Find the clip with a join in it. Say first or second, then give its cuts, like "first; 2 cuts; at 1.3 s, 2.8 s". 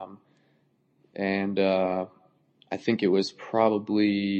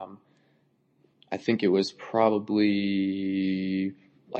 second; 1 cut; at 1.1 s